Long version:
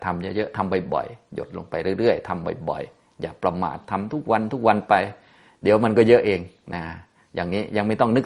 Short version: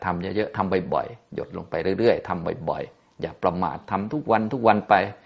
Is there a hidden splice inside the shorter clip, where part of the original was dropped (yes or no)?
no